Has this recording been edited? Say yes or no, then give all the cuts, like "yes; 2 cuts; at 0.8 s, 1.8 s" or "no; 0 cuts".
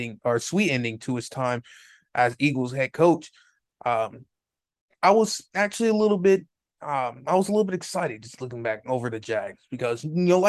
no; 0 cuts